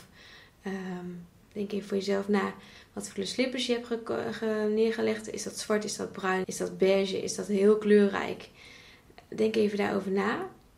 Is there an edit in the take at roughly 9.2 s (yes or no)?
no